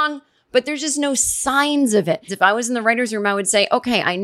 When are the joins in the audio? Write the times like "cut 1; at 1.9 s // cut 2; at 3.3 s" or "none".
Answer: cut 1; at 2.3 s